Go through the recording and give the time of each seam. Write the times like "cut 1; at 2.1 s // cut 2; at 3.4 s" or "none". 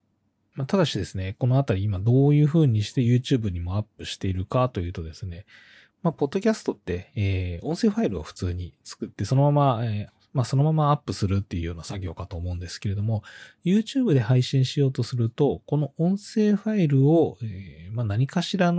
none